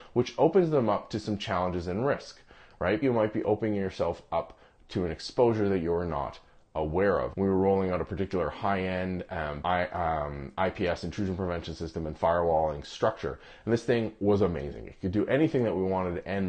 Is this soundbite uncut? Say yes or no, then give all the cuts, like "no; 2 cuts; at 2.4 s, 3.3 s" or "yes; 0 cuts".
no; 3 cuts; at 3.0 s, 7.3 s, 9.6 s